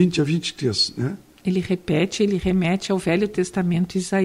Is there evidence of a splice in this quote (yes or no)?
no